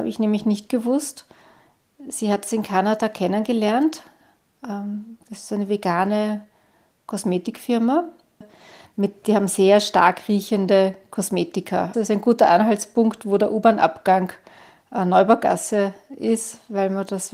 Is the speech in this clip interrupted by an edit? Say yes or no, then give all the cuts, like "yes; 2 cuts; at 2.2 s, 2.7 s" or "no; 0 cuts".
yes; 2 cuts; at 8.4 s, 11.9 s